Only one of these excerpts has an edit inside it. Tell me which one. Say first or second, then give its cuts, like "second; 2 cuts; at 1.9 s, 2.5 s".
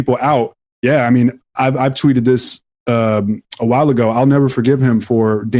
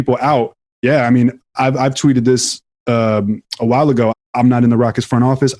second; 1 cut; at 4.1 s